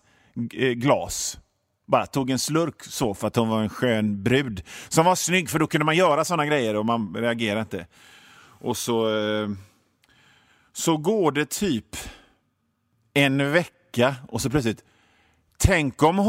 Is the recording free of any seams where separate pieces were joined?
yes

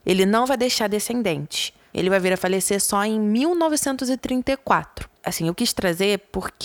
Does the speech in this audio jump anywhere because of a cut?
yes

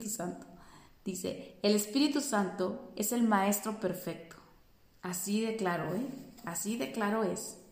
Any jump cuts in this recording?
yes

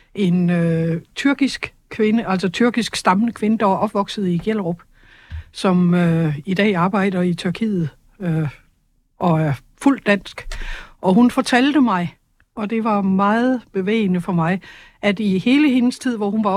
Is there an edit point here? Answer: no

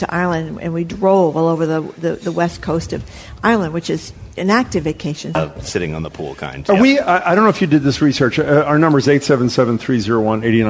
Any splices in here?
yes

